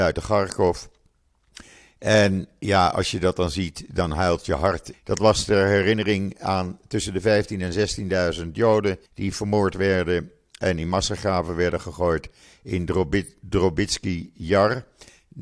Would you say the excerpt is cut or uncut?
cut